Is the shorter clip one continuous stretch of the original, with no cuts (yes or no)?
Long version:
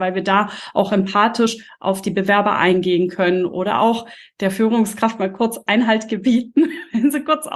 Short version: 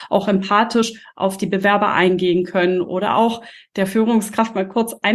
yes